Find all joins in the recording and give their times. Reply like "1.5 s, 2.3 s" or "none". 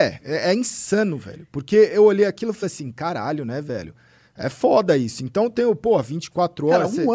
none